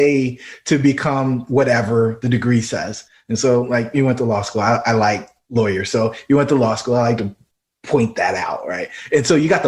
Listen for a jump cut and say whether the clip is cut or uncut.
uncut